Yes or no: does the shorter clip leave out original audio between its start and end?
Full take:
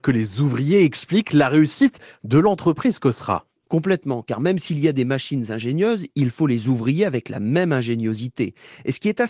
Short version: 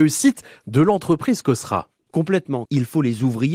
yes